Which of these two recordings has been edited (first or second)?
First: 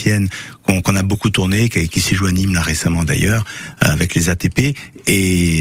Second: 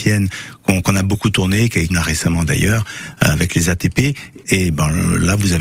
second